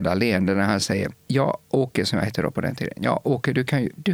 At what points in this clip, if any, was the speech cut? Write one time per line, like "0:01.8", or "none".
0:01.2